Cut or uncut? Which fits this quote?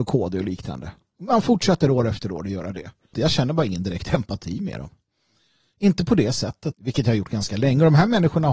cut